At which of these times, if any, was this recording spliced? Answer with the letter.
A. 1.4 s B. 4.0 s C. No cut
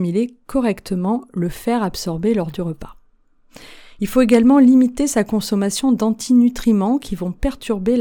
C